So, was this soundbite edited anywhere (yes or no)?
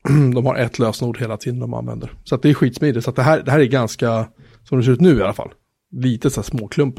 no